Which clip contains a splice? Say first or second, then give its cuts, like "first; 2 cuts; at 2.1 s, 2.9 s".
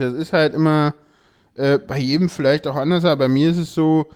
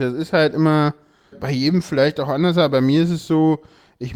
second; 1 cut; at 1.3 s